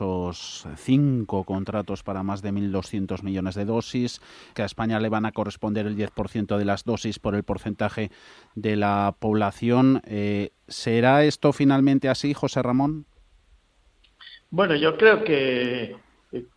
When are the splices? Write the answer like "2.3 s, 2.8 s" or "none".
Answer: 4.5 s